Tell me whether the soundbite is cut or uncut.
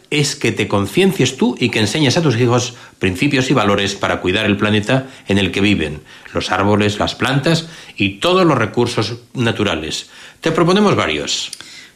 cut